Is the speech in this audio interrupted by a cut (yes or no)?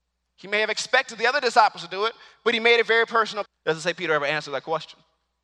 yes